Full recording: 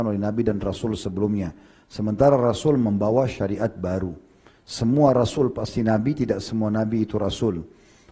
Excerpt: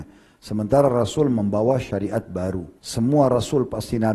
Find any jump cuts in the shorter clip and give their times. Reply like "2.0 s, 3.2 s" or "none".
2.8 s